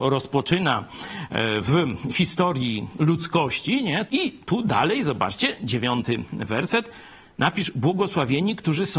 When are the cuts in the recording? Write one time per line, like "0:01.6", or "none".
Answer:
0:04.1